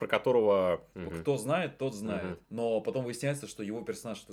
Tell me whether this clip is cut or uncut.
cut